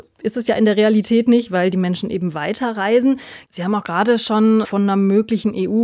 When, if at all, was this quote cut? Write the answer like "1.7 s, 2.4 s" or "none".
3.5 s, 4.6 s